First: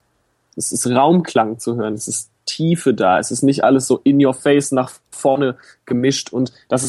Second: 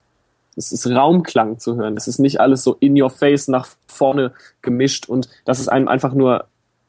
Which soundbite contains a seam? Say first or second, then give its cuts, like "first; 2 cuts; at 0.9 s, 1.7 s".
second; 1 cut; at 2.0 s